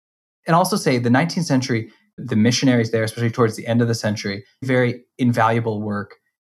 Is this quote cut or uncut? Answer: cut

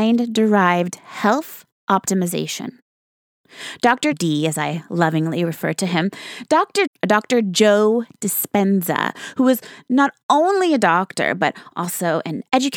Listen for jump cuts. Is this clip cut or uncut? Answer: cut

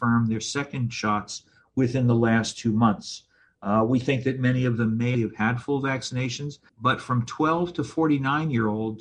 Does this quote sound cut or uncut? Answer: cut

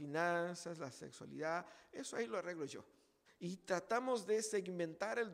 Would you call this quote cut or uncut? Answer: cut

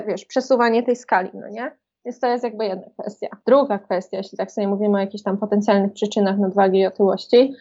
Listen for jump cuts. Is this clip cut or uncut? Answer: uncut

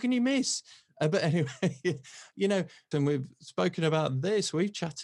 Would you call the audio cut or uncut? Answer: cut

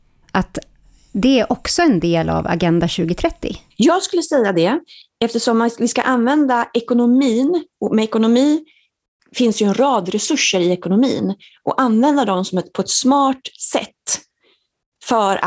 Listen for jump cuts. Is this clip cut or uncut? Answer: uncut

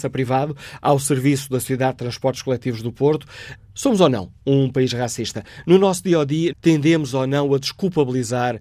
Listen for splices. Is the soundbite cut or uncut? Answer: cut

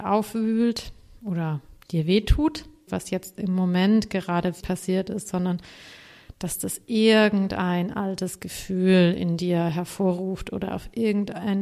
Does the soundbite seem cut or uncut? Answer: cut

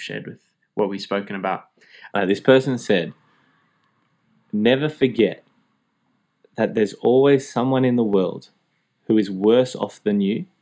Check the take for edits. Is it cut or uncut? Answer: cut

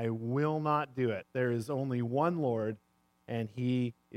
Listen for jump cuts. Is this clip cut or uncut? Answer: uncut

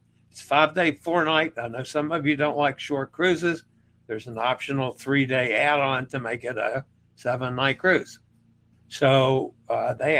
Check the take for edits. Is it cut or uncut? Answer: cut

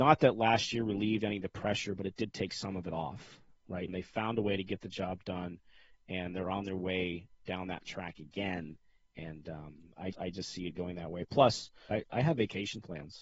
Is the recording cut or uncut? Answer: cut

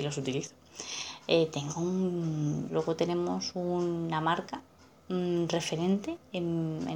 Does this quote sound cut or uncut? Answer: cut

